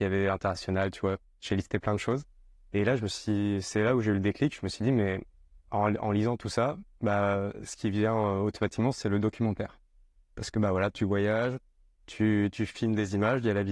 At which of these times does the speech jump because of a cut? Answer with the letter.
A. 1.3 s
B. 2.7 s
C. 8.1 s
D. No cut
D